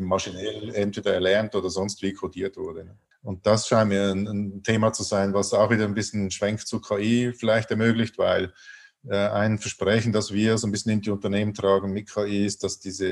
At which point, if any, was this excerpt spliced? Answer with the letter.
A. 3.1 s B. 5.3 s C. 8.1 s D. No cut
A